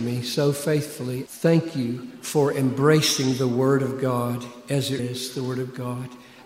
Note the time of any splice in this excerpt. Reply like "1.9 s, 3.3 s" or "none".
1.3 s, 5.0 s